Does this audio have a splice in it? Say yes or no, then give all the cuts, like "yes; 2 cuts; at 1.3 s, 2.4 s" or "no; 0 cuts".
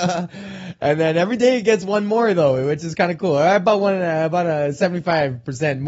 no; 0 cuts